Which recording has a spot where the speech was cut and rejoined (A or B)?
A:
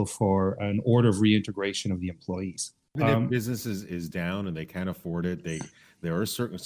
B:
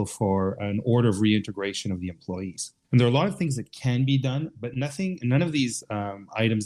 B